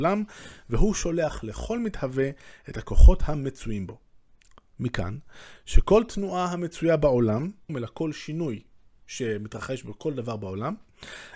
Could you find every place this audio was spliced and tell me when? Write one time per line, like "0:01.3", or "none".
0:07.7